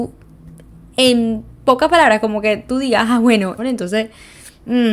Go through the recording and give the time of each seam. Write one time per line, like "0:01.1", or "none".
0:03.6

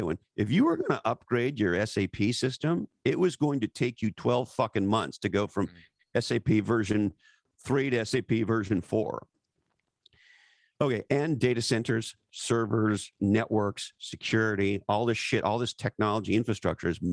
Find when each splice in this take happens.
0:13.2

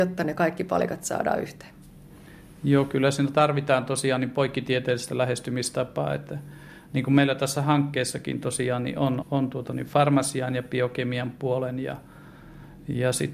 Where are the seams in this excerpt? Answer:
0:09.2

